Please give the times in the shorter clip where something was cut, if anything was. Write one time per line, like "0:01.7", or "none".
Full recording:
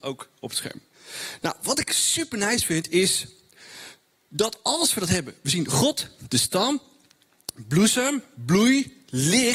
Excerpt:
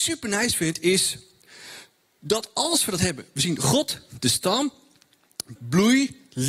0:05.6